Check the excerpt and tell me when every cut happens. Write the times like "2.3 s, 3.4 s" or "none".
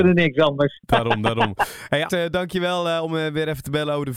2.1 s